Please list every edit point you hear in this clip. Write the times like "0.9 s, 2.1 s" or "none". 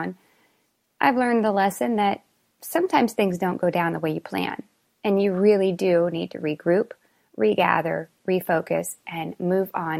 none